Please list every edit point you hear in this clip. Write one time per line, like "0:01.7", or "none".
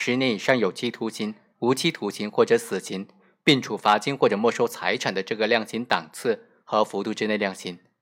none